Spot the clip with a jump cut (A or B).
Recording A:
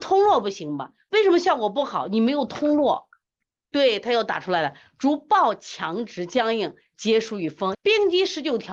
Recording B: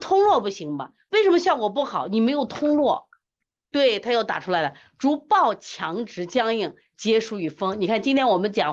A